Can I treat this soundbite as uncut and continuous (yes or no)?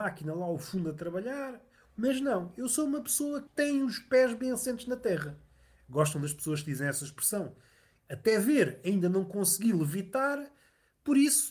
no